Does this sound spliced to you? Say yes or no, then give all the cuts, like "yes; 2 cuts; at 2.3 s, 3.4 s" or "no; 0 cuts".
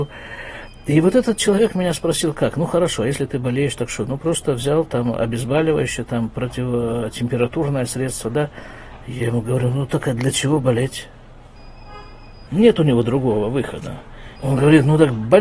yes; 2 cuts; at 12.5 s, 14.4 s